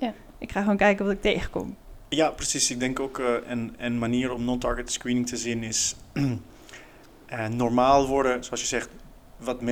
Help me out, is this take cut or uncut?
uncut